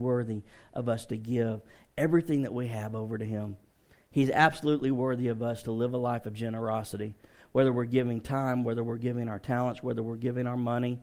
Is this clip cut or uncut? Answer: uncut